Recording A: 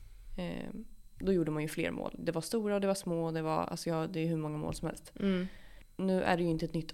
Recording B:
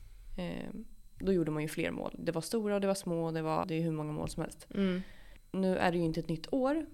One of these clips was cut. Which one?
B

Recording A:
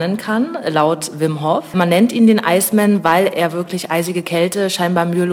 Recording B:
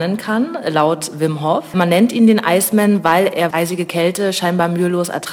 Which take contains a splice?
B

